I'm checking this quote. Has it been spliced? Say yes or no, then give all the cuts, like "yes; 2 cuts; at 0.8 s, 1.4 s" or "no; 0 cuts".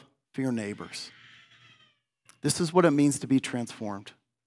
no; 0 cuts